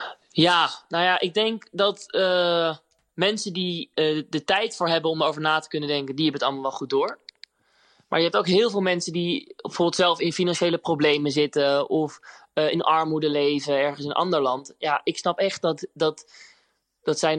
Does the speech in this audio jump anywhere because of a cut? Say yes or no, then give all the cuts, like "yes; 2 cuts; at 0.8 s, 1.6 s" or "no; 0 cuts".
no; 0 cuts